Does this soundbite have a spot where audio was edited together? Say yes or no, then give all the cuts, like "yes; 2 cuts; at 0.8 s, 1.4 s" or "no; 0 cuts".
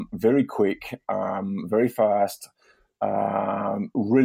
no; 0 cuts